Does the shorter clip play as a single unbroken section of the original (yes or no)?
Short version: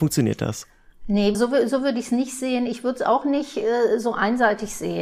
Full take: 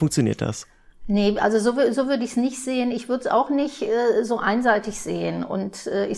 no